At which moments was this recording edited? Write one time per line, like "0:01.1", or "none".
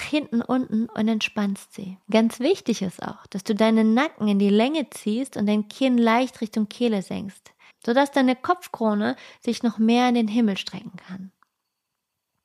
0:02.0
0:07.7